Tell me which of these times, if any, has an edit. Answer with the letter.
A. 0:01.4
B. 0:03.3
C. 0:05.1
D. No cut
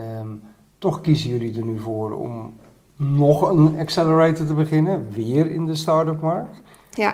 D